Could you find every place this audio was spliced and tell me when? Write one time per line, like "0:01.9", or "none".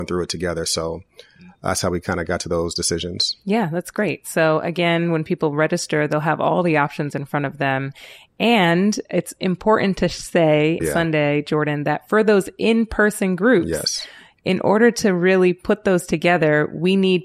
0:10.8